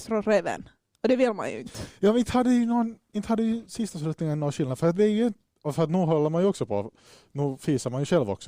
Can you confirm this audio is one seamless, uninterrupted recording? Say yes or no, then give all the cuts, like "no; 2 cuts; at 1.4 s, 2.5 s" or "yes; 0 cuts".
yes; 0 cuts